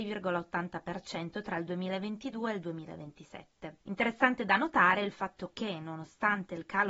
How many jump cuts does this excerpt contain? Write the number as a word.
one